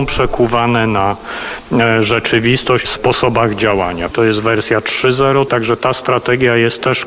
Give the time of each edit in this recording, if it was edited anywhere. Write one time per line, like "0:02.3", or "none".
0:02.8
0:04.1
0:05.5